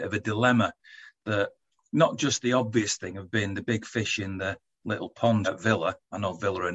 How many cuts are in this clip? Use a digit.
1